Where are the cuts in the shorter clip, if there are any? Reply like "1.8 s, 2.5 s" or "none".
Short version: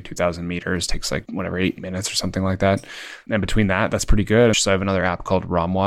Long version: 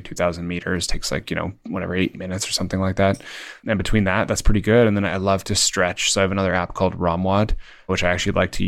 1.2 s, 4.5 s